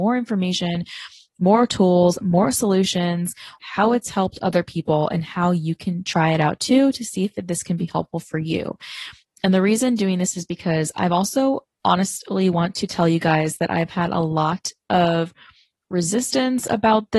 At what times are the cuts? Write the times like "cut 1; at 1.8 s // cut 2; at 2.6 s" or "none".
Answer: cut 1; at 3.6 s

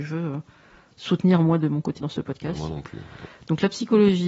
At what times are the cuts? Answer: cut 1; at 2.0 s // cut 2; at 3.2 s

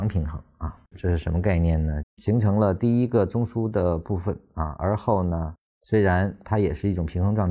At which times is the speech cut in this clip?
cut 1; at 0.9 s // cut 2; at 2.0 s // cut 3; at 5.7 s

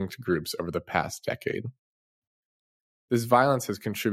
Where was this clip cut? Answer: none

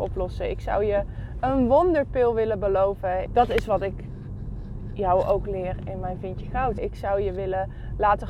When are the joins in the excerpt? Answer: cut 1; at 3.3 s // cut 2; at 6.8 s

